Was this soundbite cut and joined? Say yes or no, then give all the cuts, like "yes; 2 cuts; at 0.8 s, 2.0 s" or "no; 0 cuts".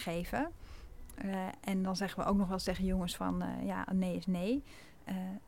no; 0 cuts